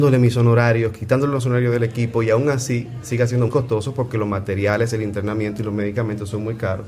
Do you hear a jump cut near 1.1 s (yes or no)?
no